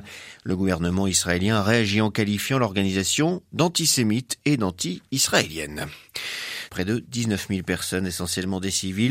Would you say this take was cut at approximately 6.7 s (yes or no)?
yes